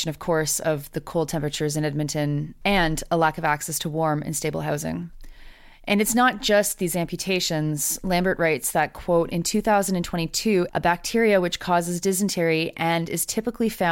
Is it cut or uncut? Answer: cut